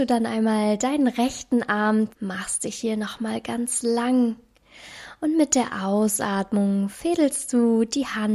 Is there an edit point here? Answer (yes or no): yes